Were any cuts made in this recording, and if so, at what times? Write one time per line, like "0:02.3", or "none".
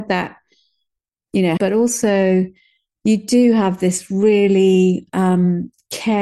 0:01.6